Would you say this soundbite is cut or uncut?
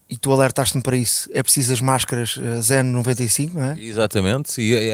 uncut